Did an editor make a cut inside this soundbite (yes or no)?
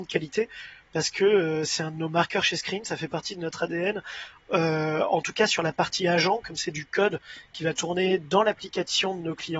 no